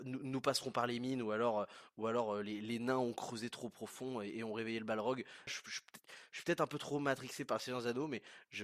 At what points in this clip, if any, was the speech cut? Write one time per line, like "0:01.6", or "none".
0:05.5